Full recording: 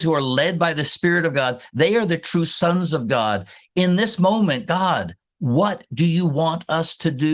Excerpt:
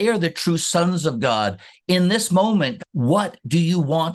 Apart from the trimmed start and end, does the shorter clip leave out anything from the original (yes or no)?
yes